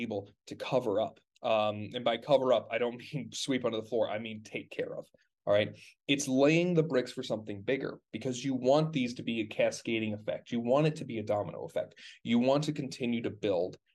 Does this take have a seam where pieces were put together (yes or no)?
yes